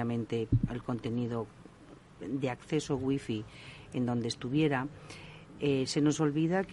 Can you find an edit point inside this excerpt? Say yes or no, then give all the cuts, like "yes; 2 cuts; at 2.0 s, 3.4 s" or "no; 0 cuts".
no; 0 cuts